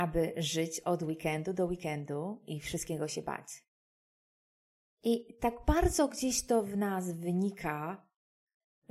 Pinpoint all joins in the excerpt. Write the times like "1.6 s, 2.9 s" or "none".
none